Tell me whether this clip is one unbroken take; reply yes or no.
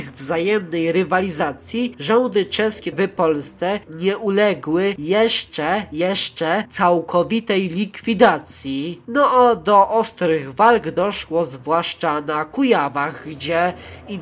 no